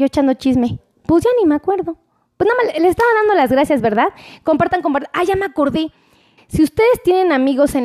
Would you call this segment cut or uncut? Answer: cut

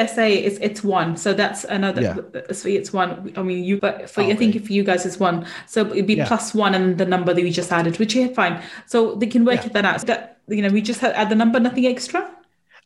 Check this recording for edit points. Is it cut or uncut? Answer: cut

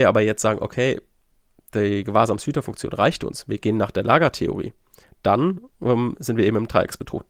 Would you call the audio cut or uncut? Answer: uncut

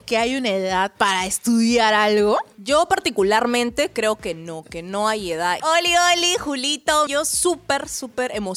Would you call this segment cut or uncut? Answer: cut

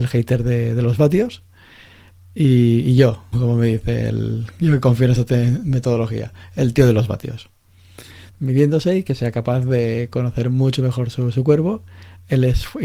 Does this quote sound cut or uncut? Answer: cut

